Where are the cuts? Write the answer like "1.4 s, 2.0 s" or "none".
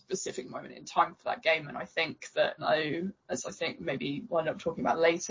2.6 s